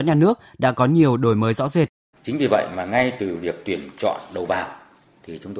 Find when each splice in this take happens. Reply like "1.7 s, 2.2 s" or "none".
2.1 s